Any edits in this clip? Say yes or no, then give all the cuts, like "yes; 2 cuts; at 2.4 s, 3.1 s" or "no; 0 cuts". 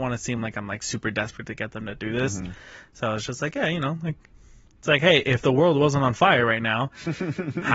no; 0 cuts